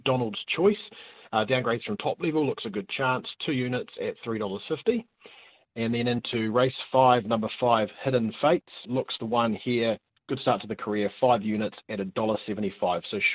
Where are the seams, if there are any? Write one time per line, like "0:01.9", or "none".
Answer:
0:08.9